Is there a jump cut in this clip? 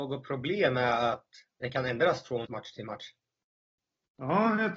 yes; 1 cut; at 2.4 s

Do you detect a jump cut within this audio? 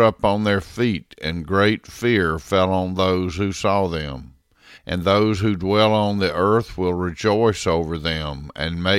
yes; 1 cut; at 4.7 s

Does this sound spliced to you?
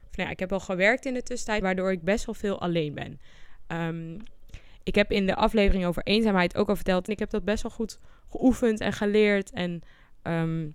yes; 2 cuts; at 1.6 s, 7.1 s

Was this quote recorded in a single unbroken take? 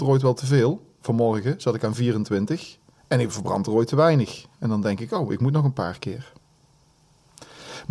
no; 1 cut; at 3.0 s

